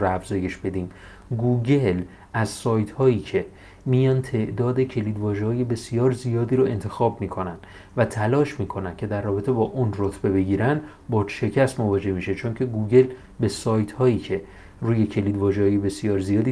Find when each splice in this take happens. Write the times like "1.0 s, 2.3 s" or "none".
none